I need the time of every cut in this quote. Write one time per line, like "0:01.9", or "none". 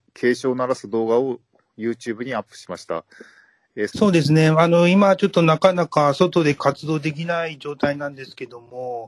0:03.9